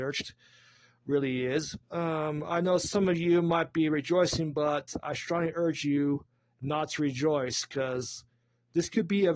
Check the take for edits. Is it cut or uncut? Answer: cut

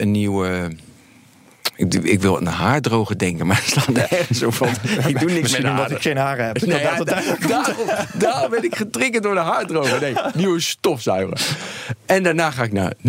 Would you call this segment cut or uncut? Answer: uncut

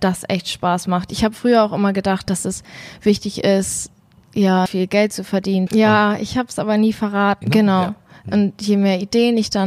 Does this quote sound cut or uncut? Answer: cut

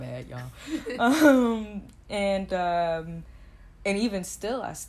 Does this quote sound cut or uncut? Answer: uncut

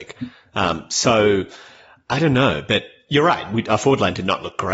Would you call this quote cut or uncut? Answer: uncut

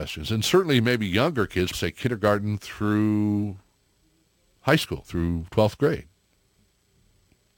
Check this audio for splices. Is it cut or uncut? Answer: cut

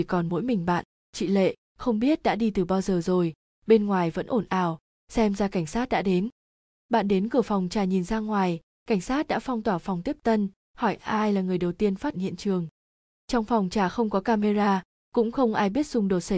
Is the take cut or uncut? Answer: cut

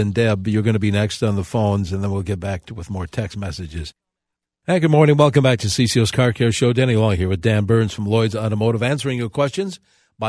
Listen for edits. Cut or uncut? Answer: uncut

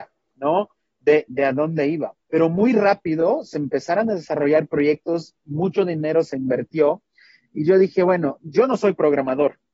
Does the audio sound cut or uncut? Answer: cut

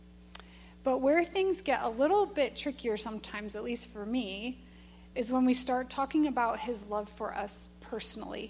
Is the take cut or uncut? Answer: cut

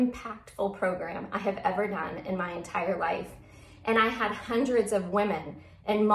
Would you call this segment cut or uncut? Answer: uncut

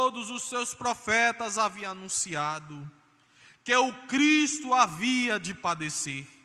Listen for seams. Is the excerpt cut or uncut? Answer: uncut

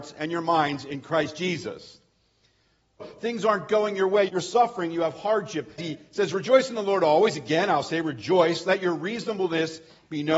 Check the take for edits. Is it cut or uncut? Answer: cut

